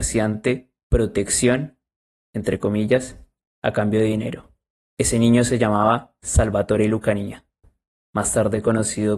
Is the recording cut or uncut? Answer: cut